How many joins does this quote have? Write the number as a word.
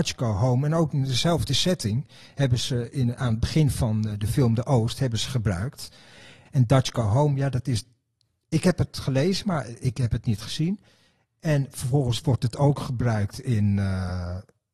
one